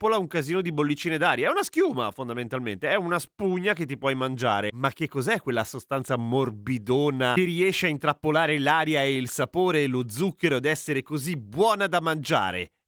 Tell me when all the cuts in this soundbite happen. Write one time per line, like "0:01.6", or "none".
none